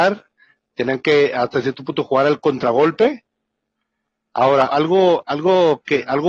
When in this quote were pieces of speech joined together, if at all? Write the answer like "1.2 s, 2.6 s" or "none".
4.7 s